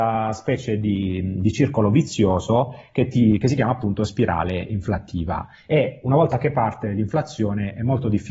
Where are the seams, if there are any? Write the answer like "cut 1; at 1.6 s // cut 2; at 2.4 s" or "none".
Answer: none